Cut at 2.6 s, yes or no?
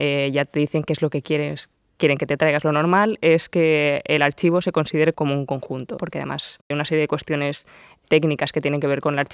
no